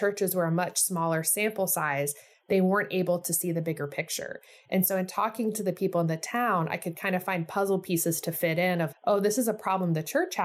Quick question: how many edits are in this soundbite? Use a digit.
1